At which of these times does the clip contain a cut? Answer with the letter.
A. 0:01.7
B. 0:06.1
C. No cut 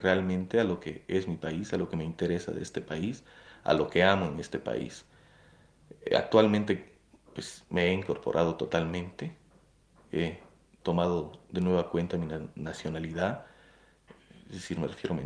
C